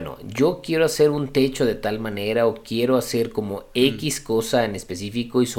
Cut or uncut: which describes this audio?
uncut